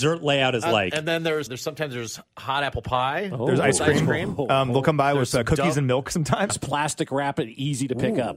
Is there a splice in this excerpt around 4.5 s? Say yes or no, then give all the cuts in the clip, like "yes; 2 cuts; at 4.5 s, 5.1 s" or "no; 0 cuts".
no; 2 cuts; at 1.5 s, 6.5 s